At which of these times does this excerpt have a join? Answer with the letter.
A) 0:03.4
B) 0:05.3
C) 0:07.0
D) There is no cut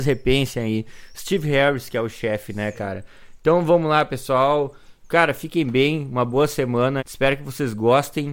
C